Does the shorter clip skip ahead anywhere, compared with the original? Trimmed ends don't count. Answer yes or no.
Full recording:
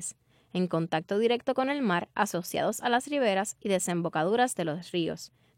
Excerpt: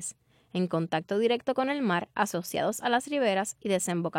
no